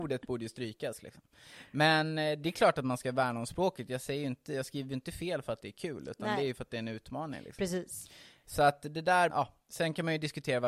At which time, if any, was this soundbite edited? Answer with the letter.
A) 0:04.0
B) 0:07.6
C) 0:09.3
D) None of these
C